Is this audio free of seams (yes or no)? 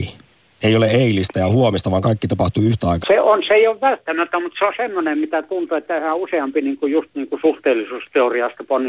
no